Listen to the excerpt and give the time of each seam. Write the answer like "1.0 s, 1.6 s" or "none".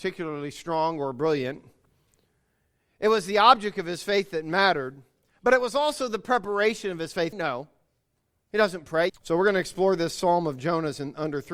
7.3 s, 9.1 s